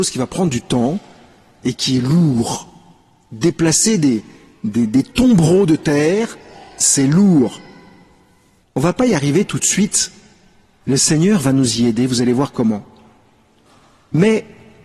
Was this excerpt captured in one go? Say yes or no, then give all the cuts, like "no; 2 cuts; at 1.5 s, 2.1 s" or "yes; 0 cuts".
no; 1 cut; at 8.6 s